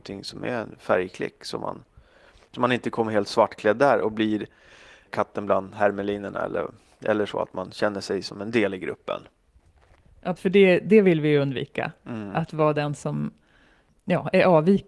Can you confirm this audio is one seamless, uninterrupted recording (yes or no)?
no